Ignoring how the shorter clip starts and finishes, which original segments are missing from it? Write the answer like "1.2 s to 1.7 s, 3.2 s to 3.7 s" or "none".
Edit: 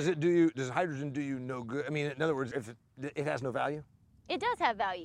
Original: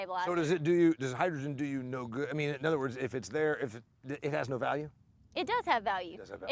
2.9 s to 3.6 s